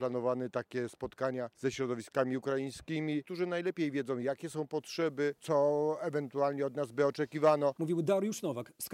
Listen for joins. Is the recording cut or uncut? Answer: cut